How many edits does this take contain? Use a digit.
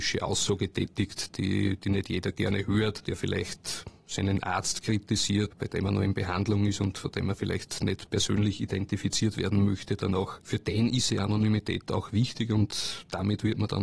1